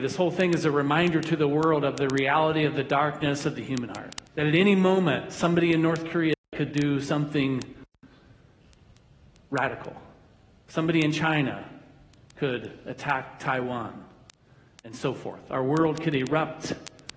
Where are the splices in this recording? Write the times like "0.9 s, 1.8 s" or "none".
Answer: 4.3 s